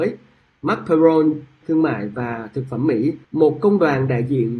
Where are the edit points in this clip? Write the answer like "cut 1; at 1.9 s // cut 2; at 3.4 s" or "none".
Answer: cut 1; at 1.6 s // cut 2; at 3.2 s